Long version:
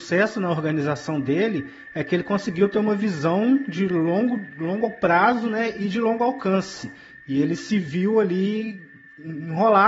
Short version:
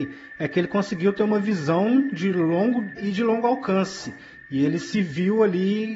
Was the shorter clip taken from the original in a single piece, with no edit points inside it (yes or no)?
no